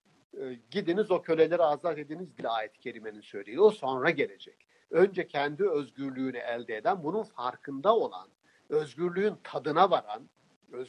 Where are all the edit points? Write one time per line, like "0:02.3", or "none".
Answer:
none

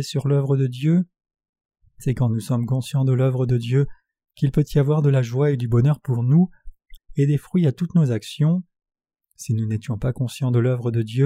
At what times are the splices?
0:07.0

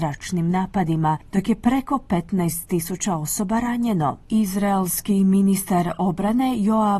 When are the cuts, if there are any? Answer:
0:01.3

